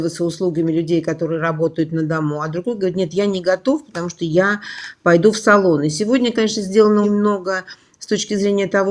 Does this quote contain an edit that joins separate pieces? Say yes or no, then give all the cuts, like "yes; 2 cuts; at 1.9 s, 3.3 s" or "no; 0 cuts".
yes; 1 cut; at 7.0 s